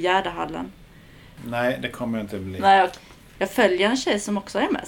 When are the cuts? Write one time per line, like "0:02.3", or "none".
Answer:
0:01.4
0:03.3

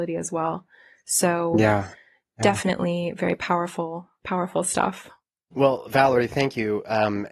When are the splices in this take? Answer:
none

